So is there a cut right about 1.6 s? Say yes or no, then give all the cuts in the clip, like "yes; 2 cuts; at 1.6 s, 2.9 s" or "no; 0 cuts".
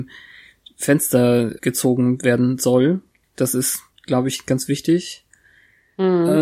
yes; 1 cut; at 1.6 s